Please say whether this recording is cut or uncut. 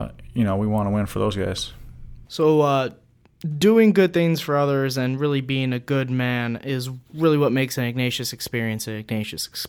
cut